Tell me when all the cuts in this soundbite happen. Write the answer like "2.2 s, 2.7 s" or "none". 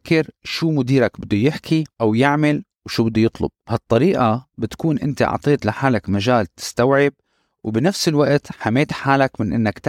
1.9 s, 3.6 s